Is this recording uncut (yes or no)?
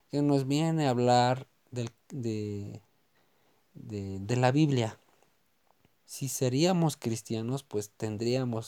no